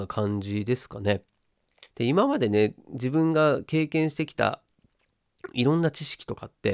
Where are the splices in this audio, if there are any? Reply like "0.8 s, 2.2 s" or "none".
1.9 s

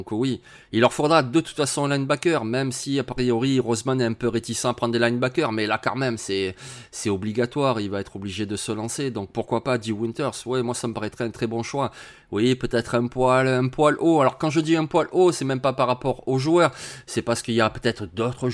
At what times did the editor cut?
none

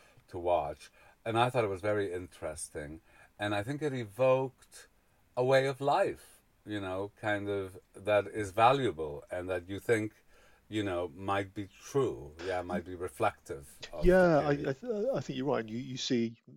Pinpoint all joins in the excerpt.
none

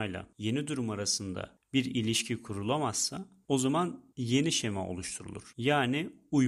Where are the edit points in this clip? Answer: none

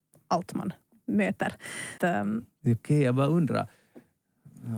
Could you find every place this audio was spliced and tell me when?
2.0 s

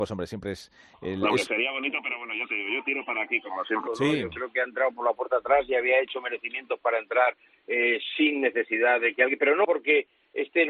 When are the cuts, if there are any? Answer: 3.9 s

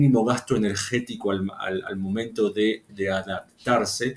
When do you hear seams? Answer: 2.9 s

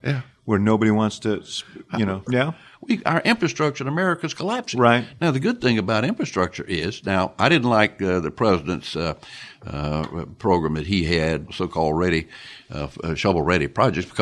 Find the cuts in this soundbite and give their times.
2.3 s, 11.5 s

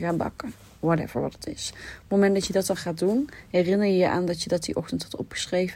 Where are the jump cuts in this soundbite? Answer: none

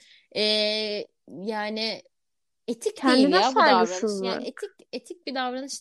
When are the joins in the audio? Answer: none

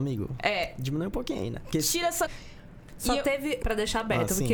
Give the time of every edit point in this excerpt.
2.3 s, 3.6 s

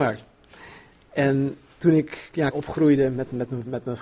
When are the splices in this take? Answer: 0.9 s, 2.5 s

